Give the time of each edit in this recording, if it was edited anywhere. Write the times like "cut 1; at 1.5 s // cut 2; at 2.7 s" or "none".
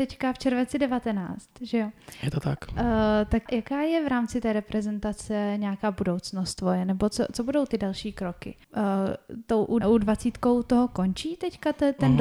cut 1; at 3.5 s // cut 2; at 8.6 s // cut 3; at 9.8 s

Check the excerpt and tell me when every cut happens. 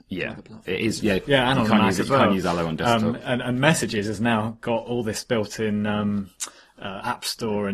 cut 1; at 1.0 s

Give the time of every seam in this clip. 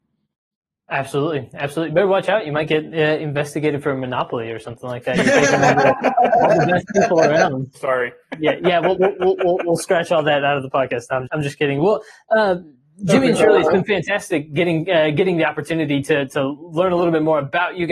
cut 1; at 7.7 s // cut 2; at 11.3 s

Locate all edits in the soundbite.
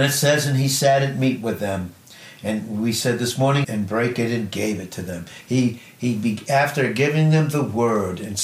cut 1; at 3.6 s

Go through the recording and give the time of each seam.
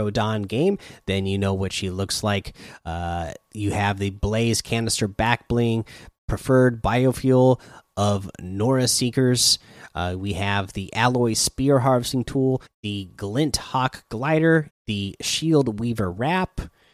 cut 1; at 12.7 s // cut 2; at 14.7 s

